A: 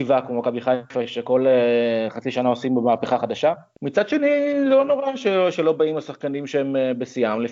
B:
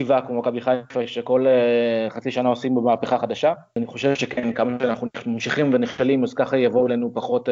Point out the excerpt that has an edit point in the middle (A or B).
A